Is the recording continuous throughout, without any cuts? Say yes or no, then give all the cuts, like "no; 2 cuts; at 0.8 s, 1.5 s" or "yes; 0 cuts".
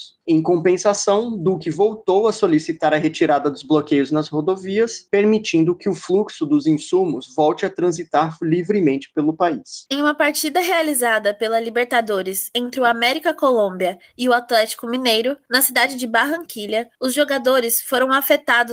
yes; 0 cuts